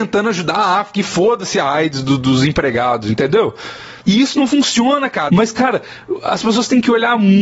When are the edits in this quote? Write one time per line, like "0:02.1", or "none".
0:04.0
0:05.3